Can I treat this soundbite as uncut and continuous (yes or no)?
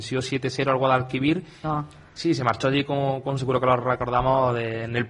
no